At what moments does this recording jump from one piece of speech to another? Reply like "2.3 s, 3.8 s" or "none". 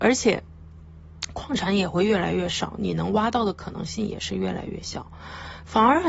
none